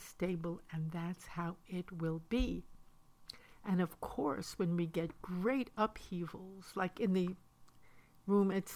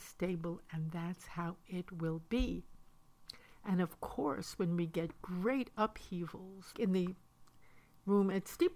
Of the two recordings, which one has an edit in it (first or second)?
second